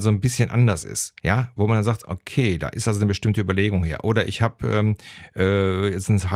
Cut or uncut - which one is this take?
cut